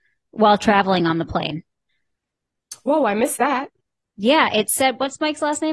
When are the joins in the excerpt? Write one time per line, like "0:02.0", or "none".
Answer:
none